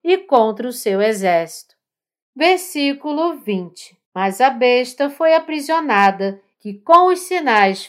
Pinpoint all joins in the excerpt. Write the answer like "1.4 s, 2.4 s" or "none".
2.2 s, 4.0 s, 6.5 s